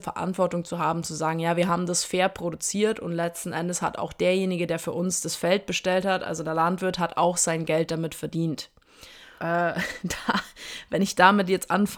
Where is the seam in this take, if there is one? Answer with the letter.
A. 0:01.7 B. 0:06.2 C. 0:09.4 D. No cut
C